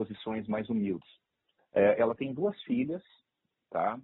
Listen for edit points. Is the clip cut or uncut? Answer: cut